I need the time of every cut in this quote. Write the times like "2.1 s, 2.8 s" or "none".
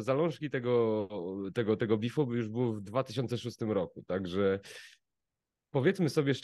none